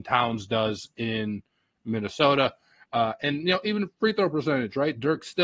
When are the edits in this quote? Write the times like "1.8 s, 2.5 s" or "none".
none